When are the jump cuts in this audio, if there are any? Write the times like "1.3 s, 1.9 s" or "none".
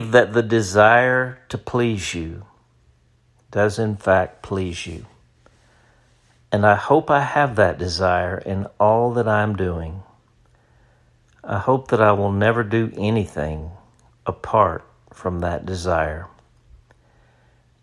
none